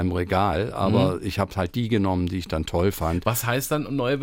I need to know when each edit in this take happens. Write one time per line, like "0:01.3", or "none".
none